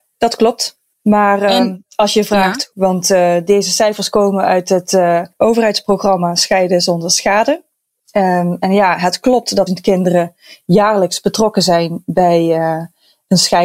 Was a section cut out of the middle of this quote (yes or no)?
yes